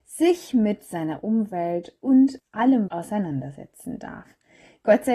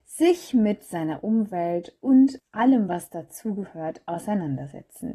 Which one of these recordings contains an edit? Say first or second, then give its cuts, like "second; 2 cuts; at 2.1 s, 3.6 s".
first; 1 cut; at 2.9 s